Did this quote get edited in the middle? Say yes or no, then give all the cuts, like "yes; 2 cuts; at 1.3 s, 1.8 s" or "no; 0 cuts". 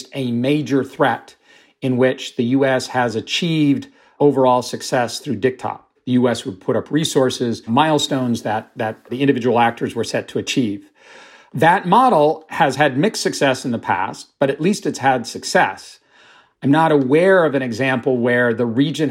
yes; 2 cuts; at 6.0 s, 7.7 s